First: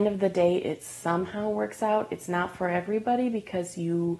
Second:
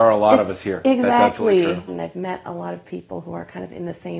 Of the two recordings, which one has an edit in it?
second; 1 cut; at 1.9 s

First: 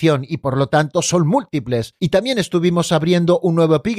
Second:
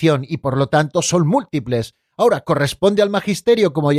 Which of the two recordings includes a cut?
first; 1 cut; at 2.0 s

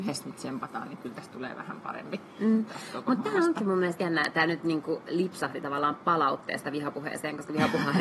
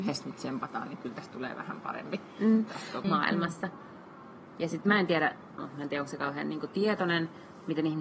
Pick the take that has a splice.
second; 2 cuts; at 3.0 s, 5.6 s

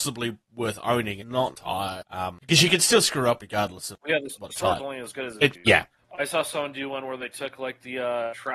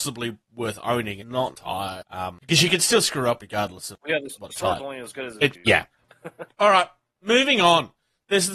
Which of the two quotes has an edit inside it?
first; 1 cut; at 6.1 s

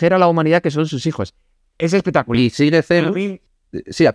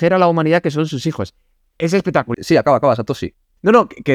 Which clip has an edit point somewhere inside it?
second; 1 cut; at 2.3 s

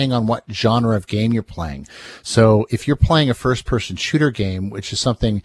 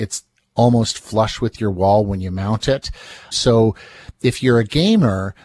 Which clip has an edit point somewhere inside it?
second; 1 cut; at 3.3 s

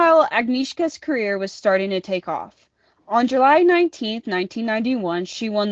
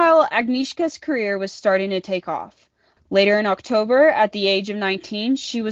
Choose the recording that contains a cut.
second; 1 cut; at 3.0 s

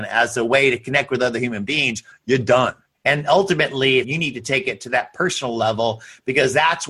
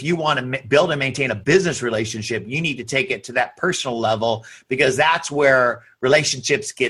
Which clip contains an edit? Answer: first; 2 cuts; at 2.9 s, 4.0 s

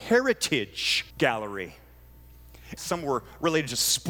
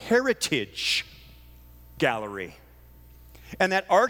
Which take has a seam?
first; 2 cuts; at 1.1 s, 2.8 s

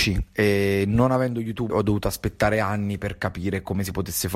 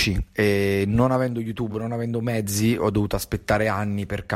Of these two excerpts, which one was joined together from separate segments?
first; 1 cut; at 1.7 s

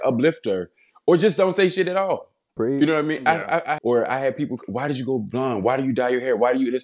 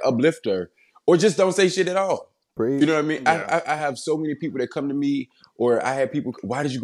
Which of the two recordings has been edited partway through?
first; 1 cut; at 3.8 s

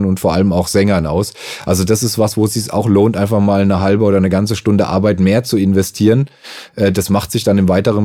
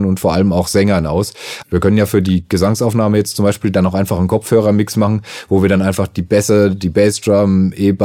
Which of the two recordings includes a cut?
second; 1 cut; at 1.6 s

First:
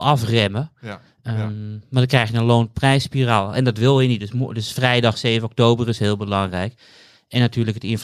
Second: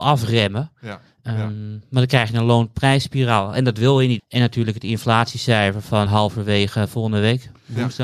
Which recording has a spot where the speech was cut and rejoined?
second; 2 cuts; at 4.2 s, 6.1 s

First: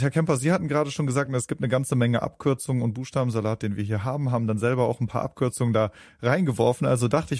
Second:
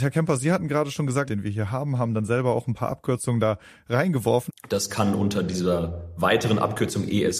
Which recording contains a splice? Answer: second; 2 cuts; at 1.3 s, 4.5 s

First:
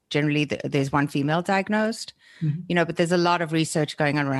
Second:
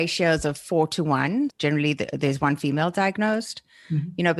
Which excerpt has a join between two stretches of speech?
second; 1 cut; at 1.5 s

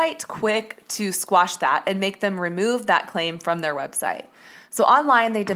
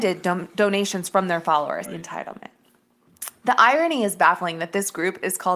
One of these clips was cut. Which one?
second; 1 cut; at 1.8 s

